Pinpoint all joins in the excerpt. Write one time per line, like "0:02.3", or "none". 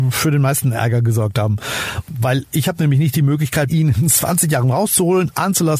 0:03.7

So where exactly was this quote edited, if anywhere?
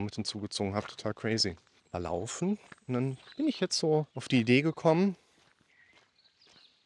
0:01.8
0:04.1

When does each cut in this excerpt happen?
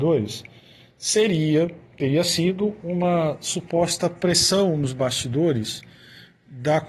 none

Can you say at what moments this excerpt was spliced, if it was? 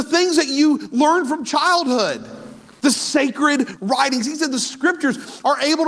0:02.8

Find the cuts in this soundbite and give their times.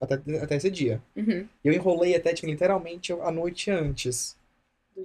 0:02.4

